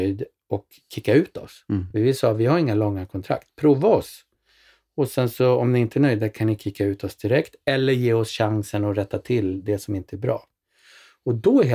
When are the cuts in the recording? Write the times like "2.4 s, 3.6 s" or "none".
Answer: none